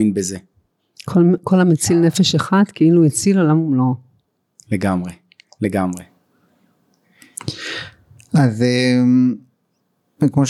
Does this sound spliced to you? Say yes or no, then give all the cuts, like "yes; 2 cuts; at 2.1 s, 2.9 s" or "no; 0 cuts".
no; 0 cuts